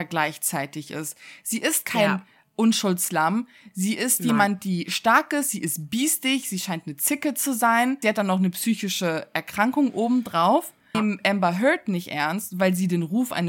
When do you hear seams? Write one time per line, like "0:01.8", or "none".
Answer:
0:08.0
0:10.9